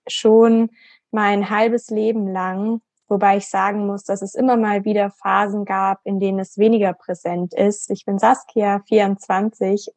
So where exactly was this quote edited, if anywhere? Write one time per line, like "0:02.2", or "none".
0:06.0
0:07.9